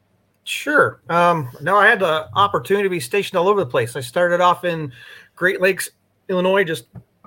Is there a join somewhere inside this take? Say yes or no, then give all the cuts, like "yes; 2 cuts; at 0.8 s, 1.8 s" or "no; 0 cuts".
no; 0 cuts